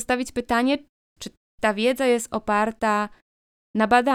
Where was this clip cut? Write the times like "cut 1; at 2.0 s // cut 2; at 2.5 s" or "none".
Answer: cut 1; at 1.2 s